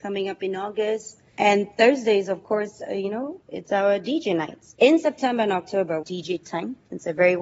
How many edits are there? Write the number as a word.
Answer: three